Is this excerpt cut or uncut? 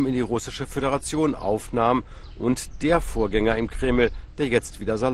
uncut